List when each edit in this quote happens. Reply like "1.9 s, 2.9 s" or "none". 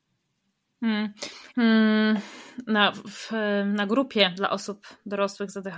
1.5 s, 2.9 s